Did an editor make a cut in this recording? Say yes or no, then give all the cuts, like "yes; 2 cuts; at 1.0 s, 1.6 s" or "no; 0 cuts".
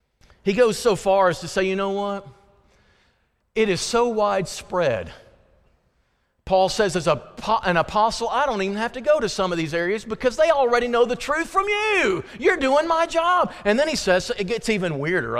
no; 0 cuts